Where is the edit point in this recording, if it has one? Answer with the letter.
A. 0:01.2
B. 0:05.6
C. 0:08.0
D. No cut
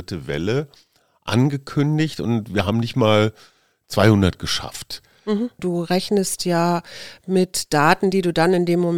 B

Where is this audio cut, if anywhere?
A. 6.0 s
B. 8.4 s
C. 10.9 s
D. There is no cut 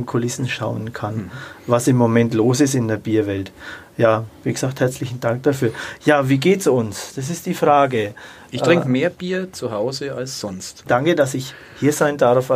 C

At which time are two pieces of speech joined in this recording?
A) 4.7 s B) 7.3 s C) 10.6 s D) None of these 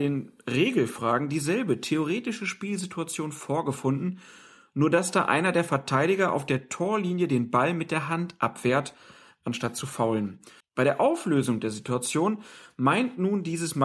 C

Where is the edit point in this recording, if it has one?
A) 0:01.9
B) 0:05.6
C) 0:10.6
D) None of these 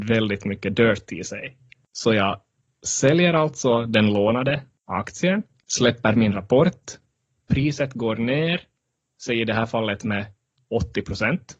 D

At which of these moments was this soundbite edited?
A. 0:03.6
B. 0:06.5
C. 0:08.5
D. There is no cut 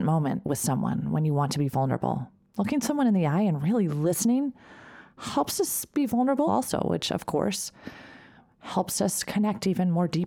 B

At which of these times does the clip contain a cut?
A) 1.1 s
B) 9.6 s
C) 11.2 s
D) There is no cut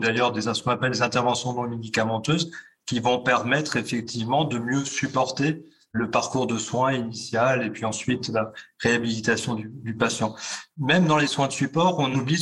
D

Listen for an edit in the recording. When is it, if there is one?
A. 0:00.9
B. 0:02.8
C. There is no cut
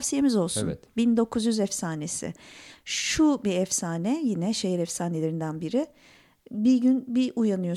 C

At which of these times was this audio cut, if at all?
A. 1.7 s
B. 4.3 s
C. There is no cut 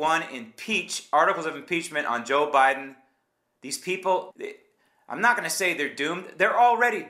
B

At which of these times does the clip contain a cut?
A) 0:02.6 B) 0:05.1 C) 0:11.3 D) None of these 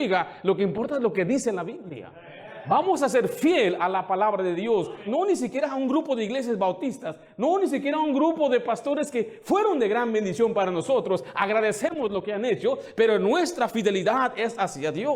B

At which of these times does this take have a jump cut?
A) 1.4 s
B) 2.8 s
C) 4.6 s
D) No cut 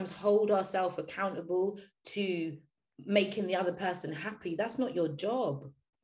B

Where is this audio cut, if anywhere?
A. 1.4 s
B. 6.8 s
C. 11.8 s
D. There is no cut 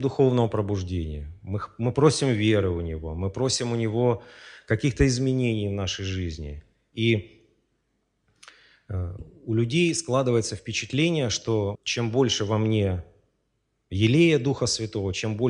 C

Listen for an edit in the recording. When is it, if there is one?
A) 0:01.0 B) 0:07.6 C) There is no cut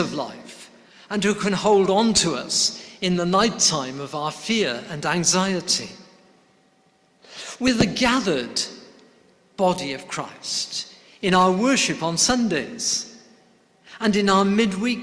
C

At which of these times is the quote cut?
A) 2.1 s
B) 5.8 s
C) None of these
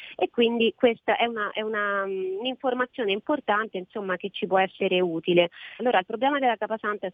B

